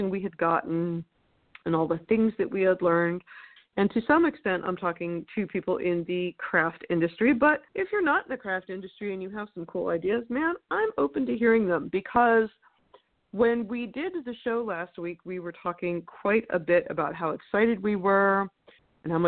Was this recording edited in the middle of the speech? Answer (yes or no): yes